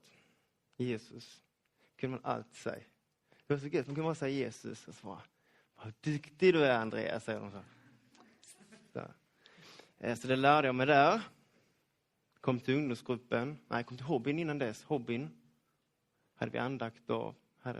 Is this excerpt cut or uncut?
uncut